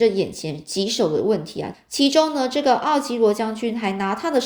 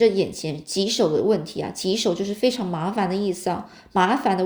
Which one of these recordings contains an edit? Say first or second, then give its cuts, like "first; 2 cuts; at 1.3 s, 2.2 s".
first; 1 cut; at 1.7 s